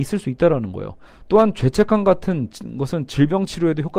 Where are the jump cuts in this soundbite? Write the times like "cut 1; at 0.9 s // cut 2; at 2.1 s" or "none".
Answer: cut 1; at 1.1 s